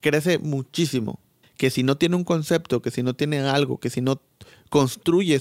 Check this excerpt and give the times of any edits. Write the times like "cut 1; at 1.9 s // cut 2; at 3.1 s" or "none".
cut 1; at 1.4 s